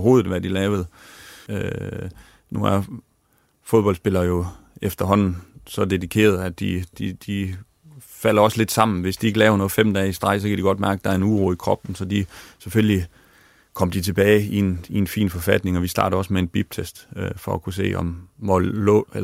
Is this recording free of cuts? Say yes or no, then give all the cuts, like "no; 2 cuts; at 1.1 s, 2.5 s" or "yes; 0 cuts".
no; 1 cut; at 1.5 s